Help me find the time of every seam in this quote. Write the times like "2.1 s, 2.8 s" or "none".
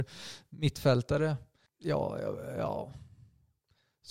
1.7 s